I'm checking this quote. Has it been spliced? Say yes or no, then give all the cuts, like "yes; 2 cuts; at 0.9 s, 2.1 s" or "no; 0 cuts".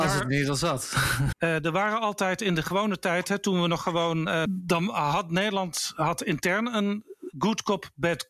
yes; 2 cuts; at 1.3 s, 4.5 s